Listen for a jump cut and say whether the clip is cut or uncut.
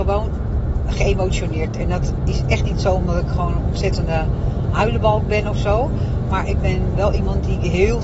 uncut